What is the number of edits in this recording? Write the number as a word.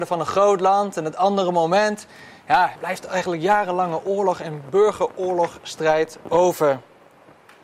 one